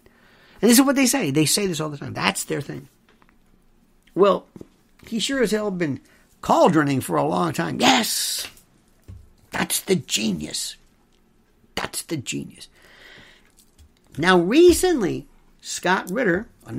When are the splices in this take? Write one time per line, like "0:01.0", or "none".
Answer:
none